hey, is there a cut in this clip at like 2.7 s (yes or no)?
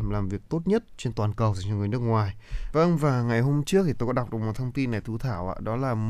yes